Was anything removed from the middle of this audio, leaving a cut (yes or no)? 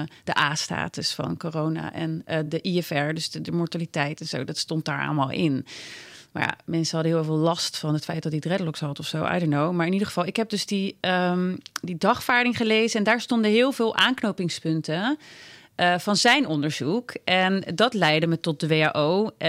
no